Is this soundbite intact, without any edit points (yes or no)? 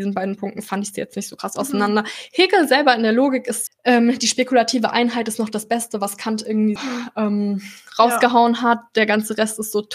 no